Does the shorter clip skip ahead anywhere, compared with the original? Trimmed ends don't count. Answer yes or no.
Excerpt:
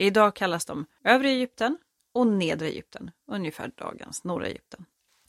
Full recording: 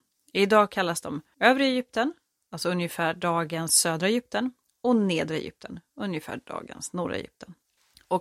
yes